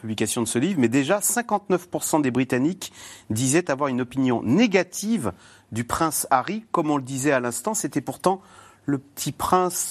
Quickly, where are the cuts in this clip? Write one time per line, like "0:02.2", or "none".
none